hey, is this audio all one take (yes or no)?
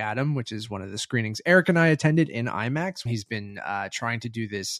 no